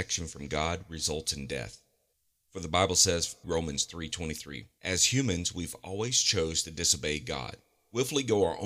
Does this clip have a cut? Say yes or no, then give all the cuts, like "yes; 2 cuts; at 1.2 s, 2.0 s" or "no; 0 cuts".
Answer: yes; 2 cuts; at 3.4 s, 4.8 s